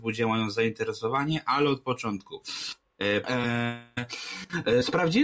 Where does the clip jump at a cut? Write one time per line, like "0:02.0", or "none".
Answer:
0:03.2